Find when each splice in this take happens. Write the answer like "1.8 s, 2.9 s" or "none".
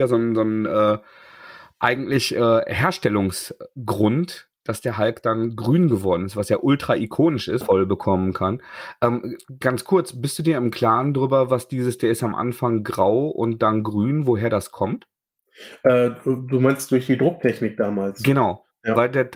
7.6 s